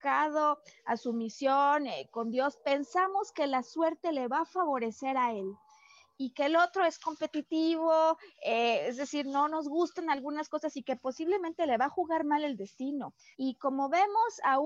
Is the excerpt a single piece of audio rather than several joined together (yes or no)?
no